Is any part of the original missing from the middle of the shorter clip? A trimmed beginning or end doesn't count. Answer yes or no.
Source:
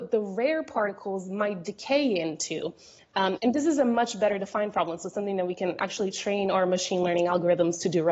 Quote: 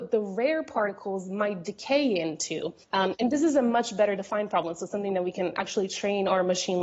yes